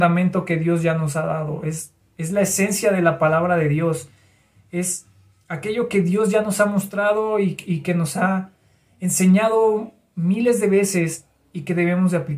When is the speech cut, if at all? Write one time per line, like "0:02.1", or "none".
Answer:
none